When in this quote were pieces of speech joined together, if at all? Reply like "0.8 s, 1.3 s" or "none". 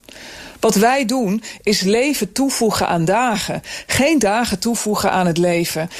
none